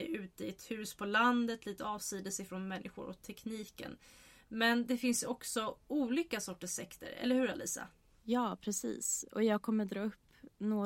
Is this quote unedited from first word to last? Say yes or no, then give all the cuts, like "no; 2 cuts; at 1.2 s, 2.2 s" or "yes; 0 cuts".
yes; 0 cuts